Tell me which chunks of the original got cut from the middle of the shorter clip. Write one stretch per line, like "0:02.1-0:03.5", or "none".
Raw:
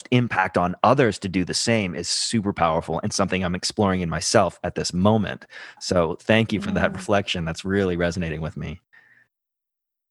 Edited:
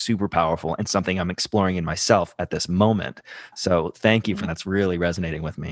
0:06.7-0:07.5